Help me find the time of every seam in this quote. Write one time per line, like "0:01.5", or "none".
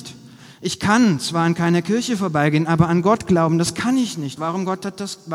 0:04.4